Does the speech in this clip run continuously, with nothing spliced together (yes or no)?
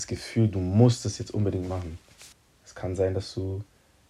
no